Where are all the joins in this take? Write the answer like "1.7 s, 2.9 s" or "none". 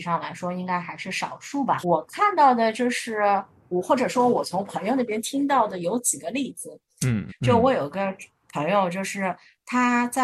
1.8 s, 7.3 s